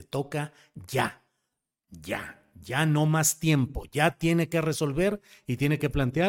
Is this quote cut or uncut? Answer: uncut